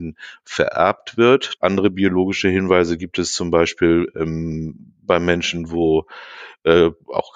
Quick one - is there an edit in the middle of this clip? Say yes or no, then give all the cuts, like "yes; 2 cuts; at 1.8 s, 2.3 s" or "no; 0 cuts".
yes; 1 cut; at 1.6 s